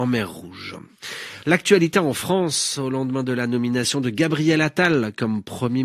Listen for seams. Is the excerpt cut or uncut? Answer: uncut